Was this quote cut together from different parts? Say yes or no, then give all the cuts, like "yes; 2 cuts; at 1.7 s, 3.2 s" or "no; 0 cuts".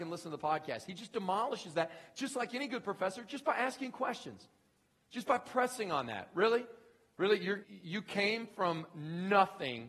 yes; 1 cut; at 7.6 s